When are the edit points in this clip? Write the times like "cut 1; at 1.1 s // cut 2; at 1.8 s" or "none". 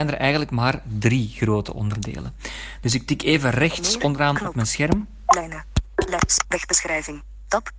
cut 1; at 6.4 s